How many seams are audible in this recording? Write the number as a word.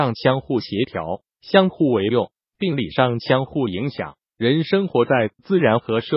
zero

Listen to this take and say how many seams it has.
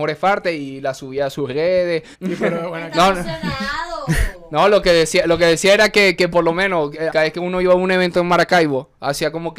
two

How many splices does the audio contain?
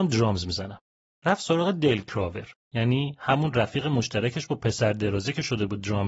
one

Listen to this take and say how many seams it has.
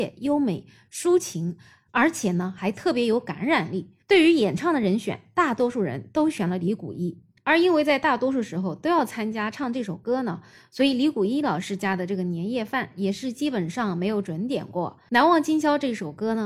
two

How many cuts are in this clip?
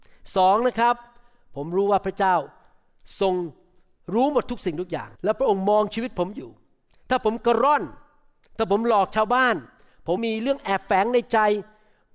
two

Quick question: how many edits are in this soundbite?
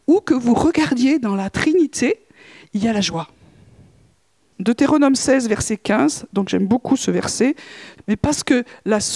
two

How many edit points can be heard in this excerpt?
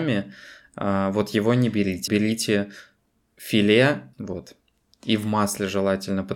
two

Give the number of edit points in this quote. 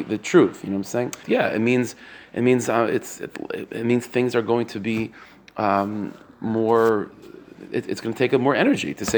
one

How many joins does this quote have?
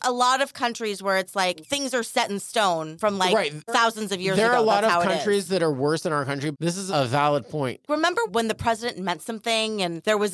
two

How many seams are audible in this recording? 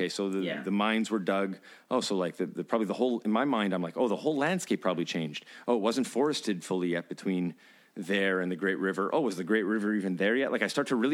zero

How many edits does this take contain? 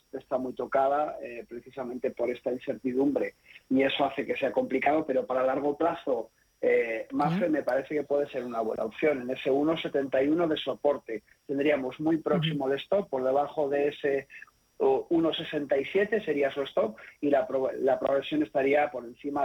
one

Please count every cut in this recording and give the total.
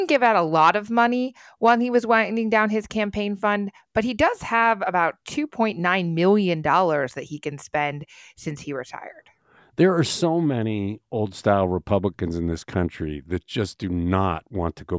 zero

